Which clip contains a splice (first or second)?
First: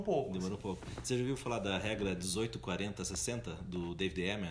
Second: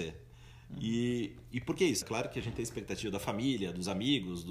second